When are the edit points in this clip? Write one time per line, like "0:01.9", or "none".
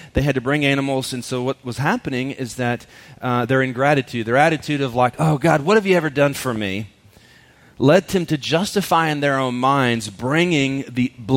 none